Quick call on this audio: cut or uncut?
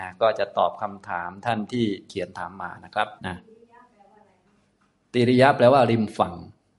cut